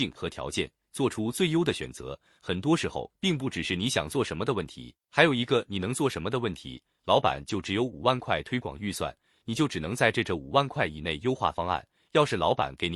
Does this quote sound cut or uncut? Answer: uncut